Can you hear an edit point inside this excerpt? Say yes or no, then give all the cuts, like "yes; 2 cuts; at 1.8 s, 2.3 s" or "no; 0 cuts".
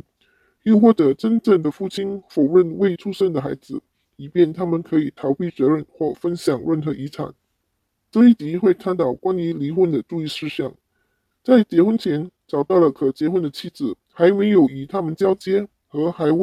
no; 0 cuts